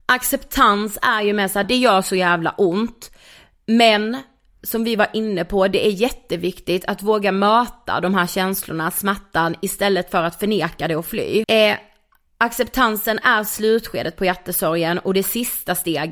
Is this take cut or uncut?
cut